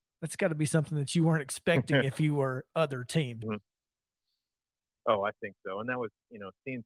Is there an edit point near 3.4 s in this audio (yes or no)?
yes